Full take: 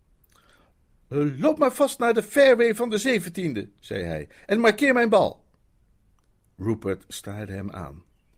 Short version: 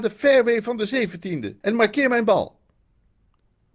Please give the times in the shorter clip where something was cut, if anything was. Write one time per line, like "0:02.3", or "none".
0:01.6